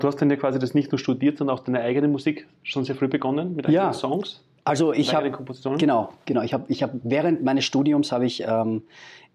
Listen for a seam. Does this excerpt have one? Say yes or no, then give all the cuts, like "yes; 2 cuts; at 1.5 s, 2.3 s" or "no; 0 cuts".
no; 0 cuts